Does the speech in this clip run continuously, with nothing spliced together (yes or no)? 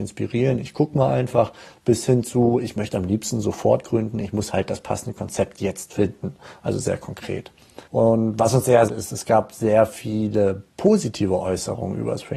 no